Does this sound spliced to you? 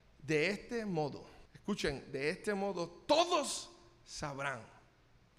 yes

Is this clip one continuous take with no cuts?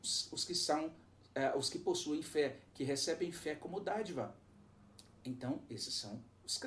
yes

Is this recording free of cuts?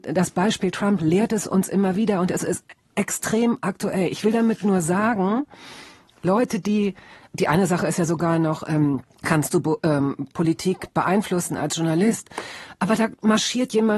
no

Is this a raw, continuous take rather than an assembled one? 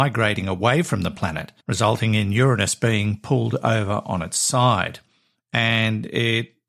no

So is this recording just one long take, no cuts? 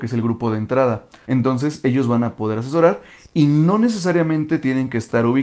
no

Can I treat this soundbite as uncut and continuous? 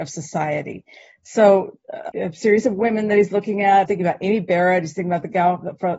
no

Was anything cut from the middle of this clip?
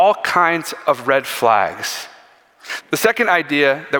yes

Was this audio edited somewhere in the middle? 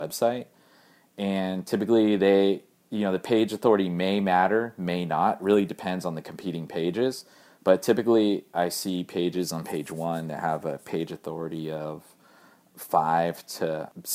no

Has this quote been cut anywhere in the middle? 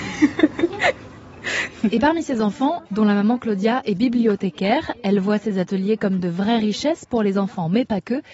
yes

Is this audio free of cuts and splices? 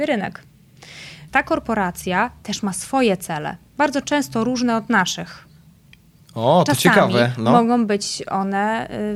no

